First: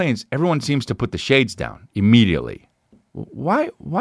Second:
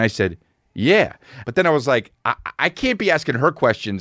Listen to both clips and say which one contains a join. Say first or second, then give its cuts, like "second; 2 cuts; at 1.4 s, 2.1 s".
second; 1 cut; at 1.4 s